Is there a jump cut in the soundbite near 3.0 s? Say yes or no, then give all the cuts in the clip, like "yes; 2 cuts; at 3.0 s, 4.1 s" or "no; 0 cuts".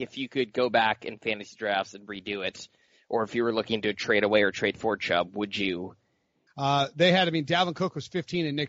no; 1 cut; at 6.5 s